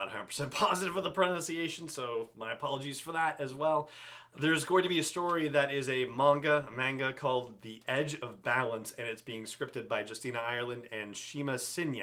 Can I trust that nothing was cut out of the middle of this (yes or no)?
yes